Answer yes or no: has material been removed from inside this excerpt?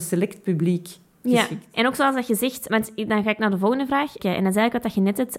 yes